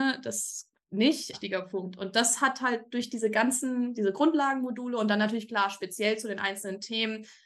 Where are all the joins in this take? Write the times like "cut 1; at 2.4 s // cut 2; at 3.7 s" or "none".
cut 1; at 1.3 s